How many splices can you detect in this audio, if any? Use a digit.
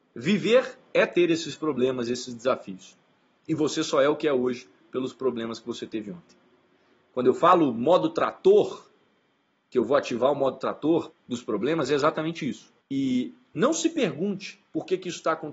2